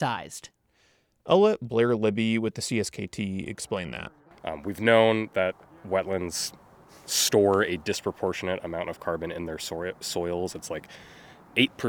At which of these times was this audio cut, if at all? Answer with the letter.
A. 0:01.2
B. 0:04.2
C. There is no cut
C